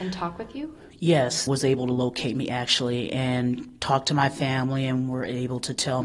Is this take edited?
yes; 1 cut; at 1.5 s

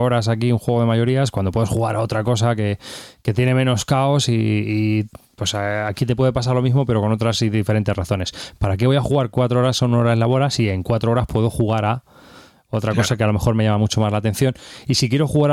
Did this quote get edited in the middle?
no; 0 cuts

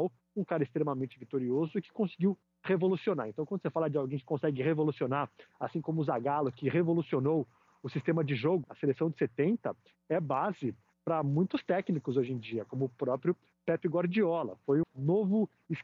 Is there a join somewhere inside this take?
yes; 2 cuts; at 8.6 s, 14.8 s

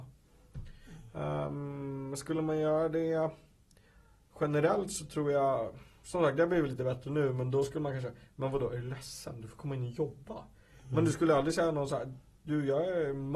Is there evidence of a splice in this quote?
no; 0 cuts

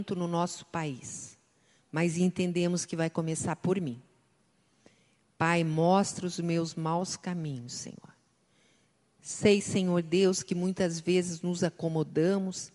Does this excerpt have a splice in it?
no; 0 cuts

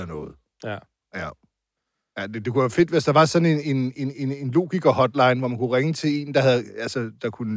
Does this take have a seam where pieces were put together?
no; 0 cuts

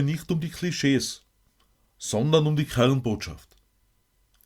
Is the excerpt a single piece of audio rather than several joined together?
yes; 0 cuts

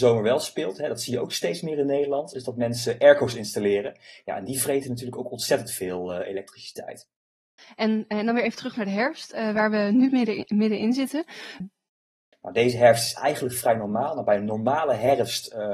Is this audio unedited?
no; 1 cut; at 11.6 s

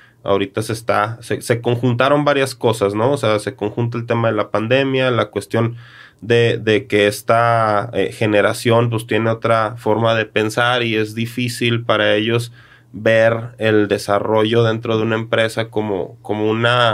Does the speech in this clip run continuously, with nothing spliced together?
yes; 0 cuts

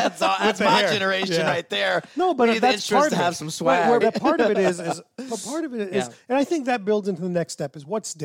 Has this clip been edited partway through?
yes; 1 cut; at 4.0 s

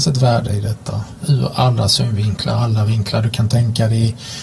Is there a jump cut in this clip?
yes; 1 cut; at 1.2 s

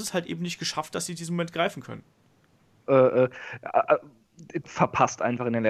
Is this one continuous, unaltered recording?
no; 2 cuts; at 2.9 s, 4.6 s

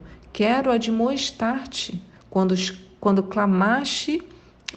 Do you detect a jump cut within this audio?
yes; 1 cut; at 2.2 s

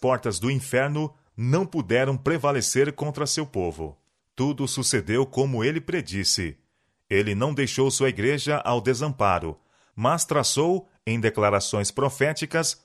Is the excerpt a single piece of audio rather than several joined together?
no; 1 cut; at 4.2 s

